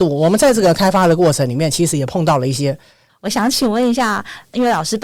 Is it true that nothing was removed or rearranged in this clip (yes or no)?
no